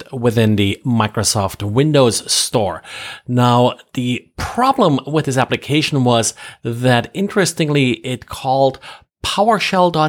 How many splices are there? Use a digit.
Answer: 0